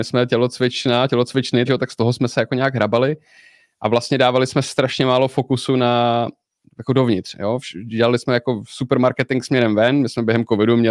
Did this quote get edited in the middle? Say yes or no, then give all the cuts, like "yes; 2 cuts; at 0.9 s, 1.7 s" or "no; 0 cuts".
yes; 1 cut; at 1.7 s